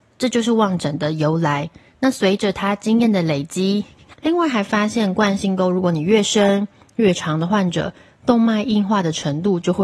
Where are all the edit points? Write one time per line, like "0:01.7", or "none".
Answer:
0:04.1